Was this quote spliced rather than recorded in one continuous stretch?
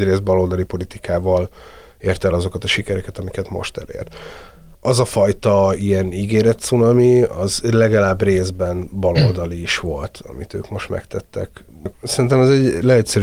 yes; 1 cut; at 11.9 s

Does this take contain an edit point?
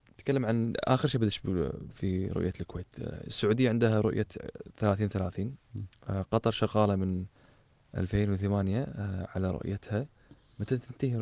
no; 0 cuts

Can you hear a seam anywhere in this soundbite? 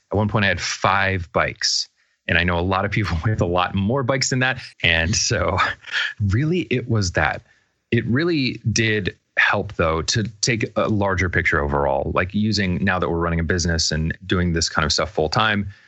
yes; 1 cut; at 4.7 s

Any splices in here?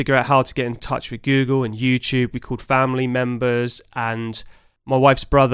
no; 0 cuts

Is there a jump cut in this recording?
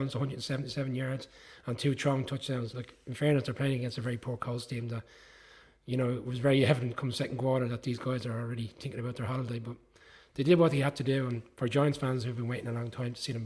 no; 0 cuts

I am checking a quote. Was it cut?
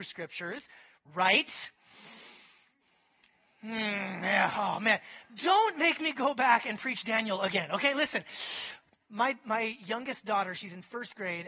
no; 0 cuts

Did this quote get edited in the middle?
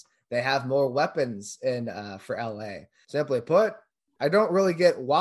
no; 0 cuts

